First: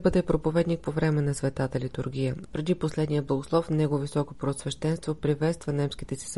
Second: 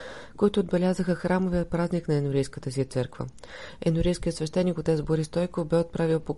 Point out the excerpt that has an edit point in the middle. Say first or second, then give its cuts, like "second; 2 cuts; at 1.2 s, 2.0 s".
first; 1 cut; at 2.5 s